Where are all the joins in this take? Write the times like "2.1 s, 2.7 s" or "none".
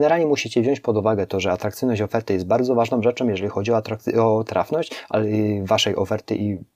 none